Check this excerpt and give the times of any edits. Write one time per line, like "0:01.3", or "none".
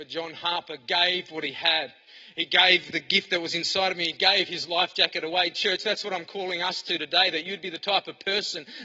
none